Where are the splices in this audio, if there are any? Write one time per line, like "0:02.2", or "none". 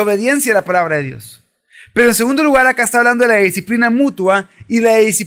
none